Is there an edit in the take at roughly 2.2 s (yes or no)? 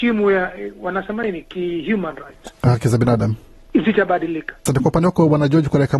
no